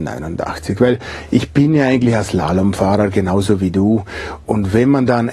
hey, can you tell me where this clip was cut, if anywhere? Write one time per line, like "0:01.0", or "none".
none